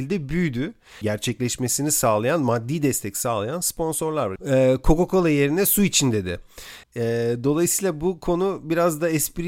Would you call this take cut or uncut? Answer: cut